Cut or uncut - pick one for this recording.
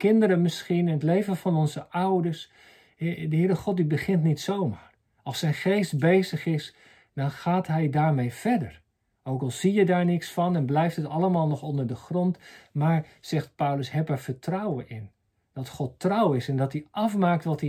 uncut